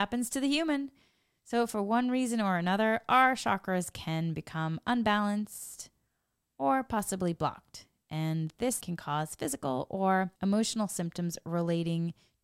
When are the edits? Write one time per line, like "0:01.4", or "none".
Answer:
0:08.8
0:10.4